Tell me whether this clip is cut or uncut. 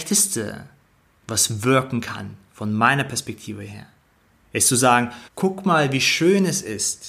cut